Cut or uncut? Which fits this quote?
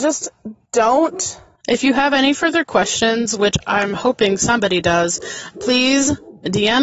cut